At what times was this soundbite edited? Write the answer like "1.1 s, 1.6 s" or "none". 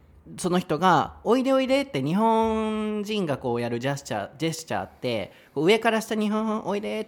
none

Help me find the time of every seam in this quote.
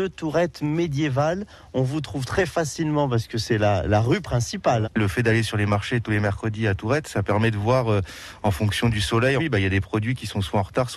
4.8 s, 9.4 s

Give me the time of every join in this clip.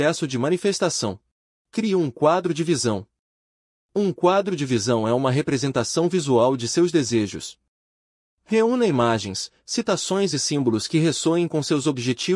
1.5 s

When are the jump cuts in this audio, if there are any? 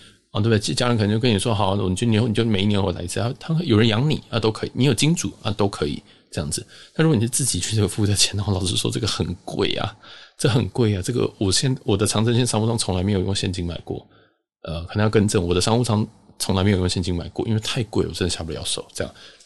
none

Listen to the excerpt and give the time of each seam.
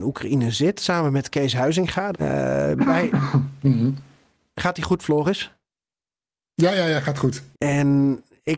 2.1 s, 7.5 s

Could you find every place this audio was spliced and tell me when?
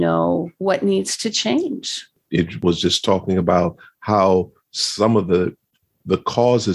2.2 s

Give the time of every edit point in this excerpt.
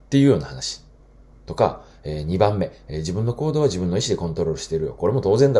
none

